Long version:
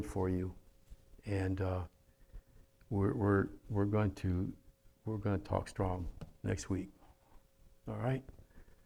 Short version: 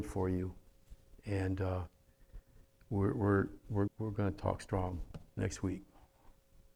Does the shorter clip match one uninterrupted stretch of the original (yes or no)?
no